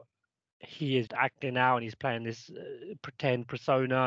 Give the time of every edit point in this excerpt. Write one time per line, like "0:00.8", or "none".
0:01.1